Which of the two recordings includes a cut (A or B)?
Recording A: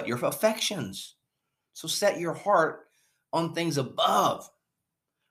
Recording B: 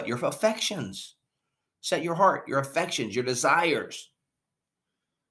A